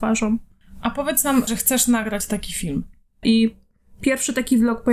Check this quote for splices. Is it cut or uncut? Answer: cut